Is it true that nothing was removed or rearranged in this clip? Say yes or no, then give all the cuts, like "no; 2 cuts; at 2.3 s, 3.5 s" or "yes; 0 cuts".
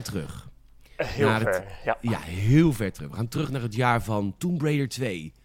yes; 0 cuts